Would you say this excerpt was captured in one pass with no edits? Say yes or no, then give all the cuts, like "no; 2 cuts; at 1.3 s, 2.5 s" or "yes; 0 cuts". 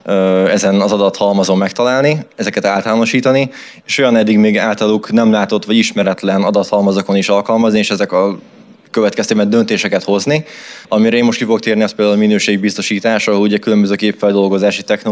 no; 1 cut; at 10.8 s